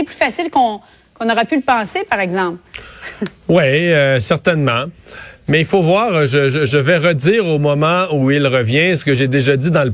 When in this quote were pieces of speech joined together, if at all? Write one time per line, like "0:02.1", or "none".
none